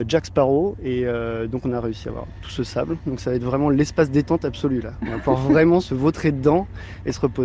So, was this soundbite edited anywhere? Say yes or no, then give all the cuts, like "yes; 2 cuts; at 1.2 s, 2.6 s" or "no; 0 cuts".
no; 0 cuts